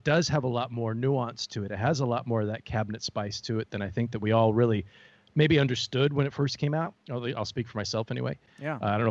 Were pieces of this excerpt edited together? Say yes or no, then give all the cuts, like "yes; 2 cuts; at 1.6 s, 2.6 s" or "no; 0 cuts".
yes; 1 cut; at 7.0 s